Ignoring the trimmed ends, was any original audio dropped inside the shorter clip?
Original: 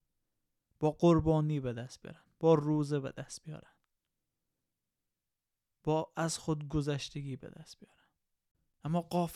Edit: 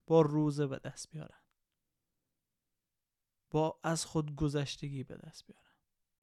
no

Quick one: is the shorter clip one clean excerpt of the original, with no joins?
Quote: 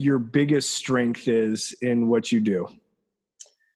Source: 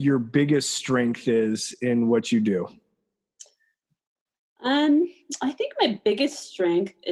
yes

